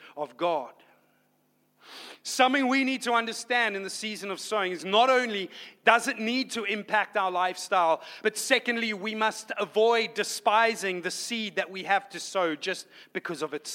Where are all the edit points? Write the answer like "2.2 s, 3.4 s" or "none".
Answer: none